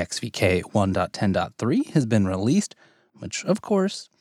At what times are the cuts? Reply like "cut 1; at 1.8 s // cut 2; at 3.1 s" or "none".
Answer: cut 1; at 3.1 s